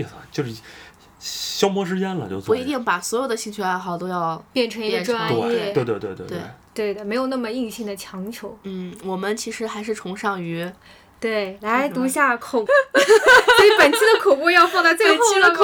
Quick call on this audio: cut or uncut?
cut